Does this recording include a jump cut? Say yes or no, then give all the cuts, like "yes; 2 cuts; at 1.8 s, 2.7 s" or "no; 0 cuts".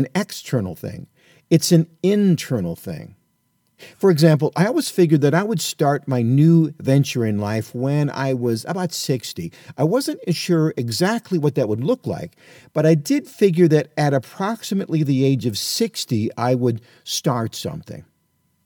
no; 0 cuts